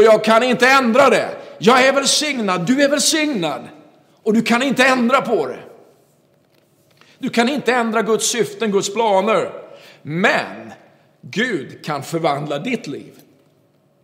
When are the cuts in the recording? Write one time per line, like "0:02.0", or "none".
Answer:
none